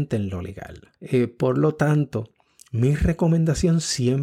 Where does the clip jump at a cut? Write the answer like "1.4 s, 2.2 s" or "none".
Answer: 0.9 s